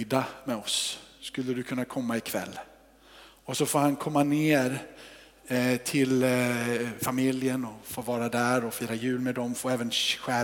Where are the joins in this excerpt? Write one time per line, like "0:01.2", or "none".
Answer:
none